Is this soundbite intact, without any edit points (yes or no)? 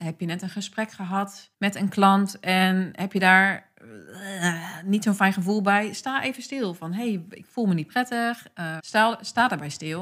no